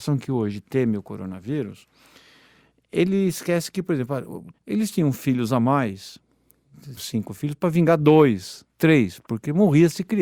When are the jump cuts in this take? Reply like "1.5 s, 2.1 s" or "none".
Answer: 4.5 s, 7.0 s